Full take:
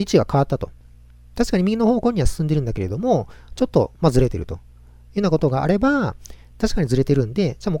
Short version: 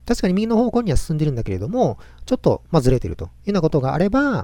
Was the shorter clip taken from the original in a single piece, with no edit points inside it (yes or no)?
no